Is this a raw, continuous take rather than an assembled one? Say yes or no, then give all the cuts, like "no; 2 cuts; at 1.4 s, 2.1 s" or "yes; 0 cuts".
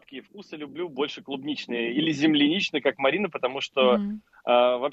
yes; 0 cuts